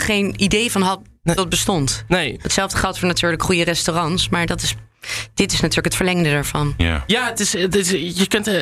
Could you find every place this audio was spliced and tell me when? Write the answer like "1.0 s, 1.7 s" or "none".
none